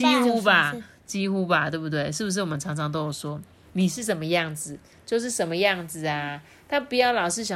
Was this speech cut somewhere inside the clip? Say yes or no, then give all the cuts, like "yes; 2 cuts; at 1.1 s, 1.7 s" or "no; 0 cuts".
no; 0 cuts